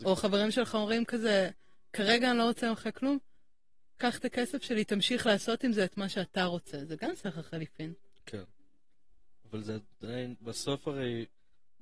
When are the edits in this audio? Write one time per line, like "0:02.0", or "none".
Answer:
none